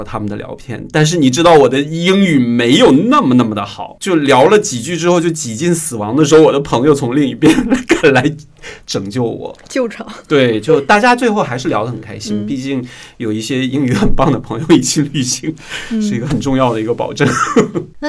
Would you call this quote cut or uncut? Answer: uncut